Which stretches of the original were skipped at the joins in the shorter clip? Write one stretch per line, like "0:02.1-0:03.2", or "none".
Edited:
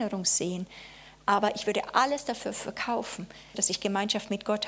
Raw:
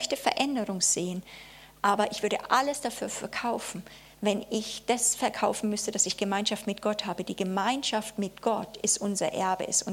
0:04.1-0:05.9

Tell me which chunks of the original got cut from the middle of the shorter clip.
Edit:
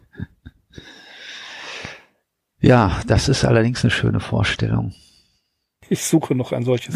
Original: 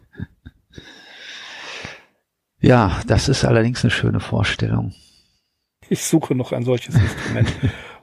none

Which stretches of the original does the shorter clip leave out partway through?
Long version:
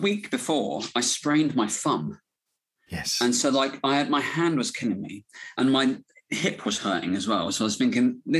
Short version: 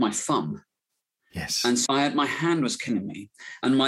0:03.4-0:03.8

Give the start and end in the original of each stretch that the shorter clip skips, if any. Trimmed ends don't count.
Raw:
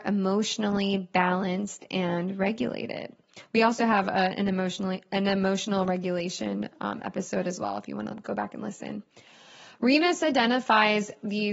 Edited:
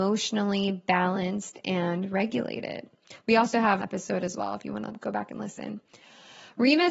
0:04.0-0:07.0

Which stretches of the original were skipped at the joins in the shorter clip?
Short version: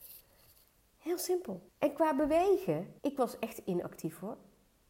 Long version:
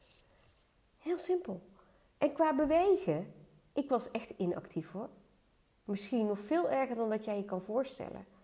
0:01.7-0:02.1
0:03.4-0:03.7

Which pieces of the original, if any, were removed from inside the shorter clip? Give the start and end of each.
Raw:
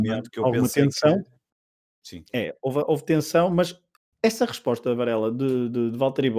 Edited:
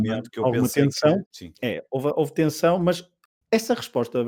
0:01.2-0:01.9

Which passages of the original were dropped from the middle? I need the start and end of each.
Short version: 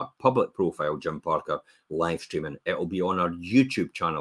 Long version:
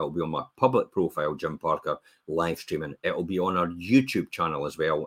none

